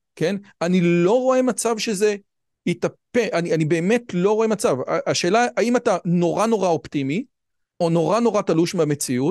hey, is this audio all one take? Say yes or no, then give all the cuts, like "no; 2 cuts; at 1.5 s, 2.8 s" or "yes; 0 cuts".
yes; 0 cuts